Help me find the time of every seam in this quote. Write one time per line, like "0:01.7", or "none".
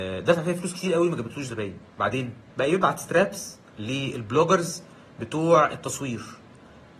0:02.5

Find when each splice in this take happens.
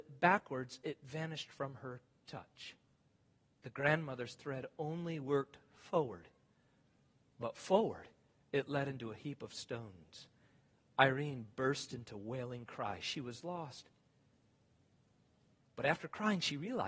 0:15.6

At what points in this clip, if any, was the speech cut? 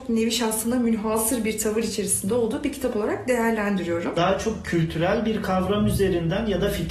0:04.1

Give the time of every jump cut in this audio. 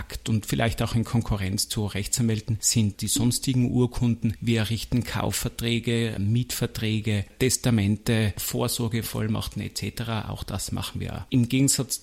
none

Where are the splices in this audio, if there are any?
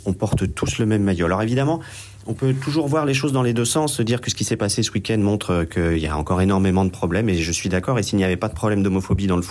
none

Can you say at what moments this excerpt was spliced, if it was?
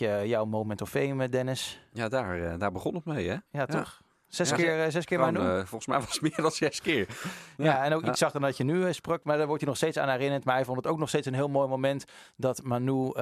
none

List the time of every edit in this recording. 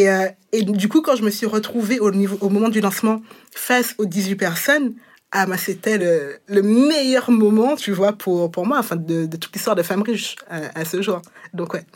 none

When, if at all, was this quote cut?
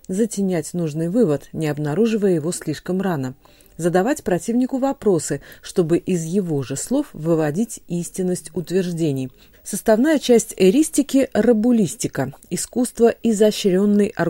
0:09.5

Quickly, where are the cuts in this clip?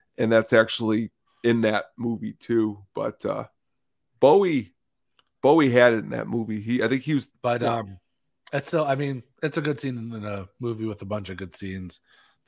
0:07.3

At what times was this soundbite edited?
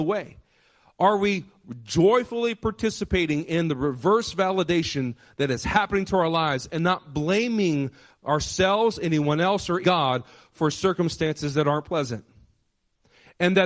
0:09.8

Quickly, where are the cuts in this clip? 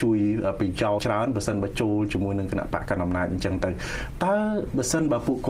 0:01.0

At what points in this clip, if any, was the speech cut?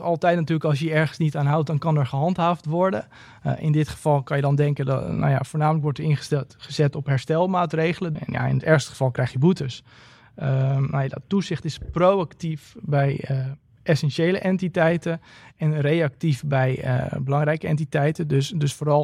0:08.1

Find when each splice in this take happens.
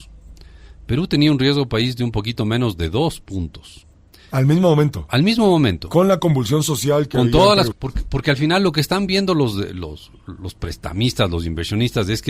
0:07.7

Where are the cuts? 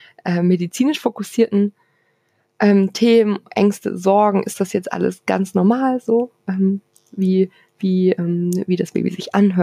none

